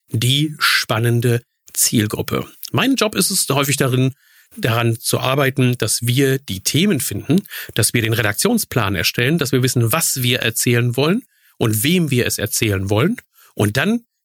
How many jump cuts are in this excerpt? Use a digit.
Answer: 1